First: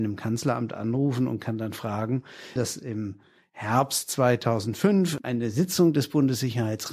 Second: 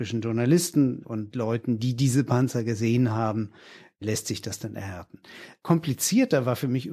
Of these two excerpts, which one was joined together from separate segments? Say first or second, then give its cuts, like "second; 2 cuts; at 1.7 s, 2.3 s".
first; 1 cut; at 2.6 s